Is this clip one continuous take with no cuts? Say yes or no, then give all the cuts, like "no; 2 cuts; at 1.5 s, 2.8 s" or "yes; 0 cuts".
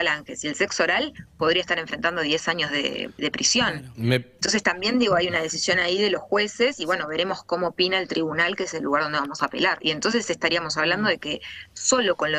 no; 2 cuts; at 3.2 s, 9.8 s